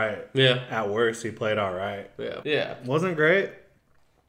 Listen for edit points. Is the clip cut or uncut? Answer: cut